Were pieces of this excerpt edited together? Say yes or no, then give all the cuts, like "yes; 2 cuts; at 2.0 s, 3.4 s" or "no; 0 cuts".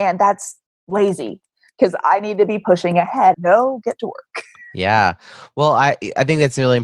yes; 1 cut; at 3.3 s